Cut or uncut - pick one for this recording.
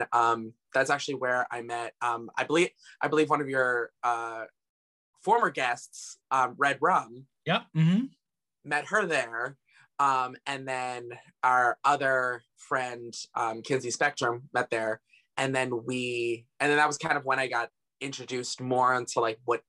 uncut